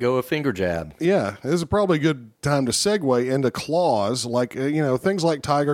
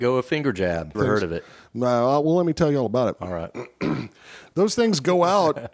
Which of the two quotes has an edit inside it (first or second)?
second